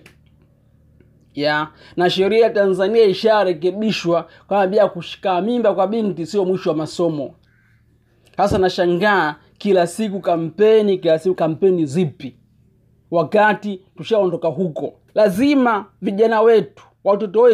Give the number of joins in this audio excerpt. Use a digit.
2